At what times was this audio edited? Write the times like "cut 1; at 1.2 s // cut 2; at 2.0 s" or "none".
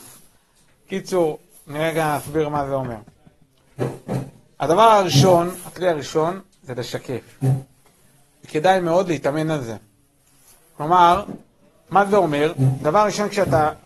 none